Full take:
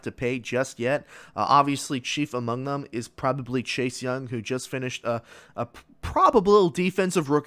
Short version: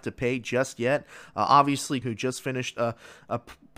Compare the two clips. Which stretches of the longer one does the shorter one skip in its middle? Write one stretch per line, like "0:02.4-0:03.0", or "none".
0:02.0-0:04.3